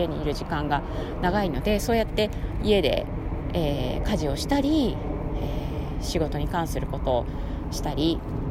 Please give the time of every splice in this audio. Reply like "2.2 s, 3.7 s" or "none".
none